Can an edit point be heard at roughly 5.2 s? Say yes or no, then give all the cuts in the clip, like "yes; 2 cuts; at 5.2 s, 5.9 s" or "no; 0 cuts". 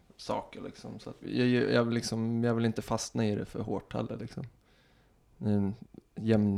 no; 1 cut; at 1.2 s